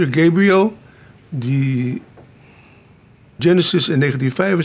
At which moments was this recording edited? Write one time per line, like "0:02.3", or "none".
0:03.4